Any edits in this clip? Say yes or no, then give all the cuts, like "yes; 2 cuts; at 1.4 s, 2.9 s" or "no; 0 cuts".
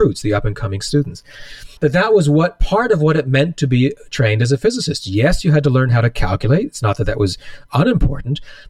yes; 1 cut; at 1.8 s